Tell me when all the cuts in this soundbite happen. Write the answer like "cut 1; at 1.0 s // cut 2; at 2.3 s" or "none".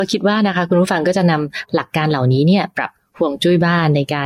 cut 1; at 2.7 s